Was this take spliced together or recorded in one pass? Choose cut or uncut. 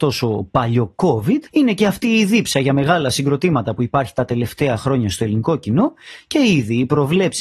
cut